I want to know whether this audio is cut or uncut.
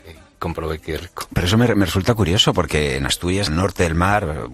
cut